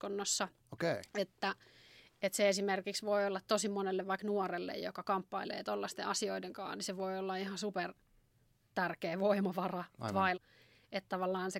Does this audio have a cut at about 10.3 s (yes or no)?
yes